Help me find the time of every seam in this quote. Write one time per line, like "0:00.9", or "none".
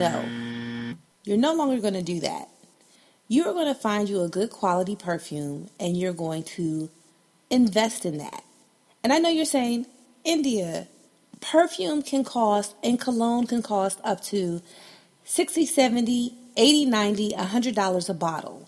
none